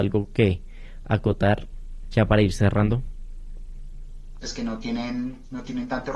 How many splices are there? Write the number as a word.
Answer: one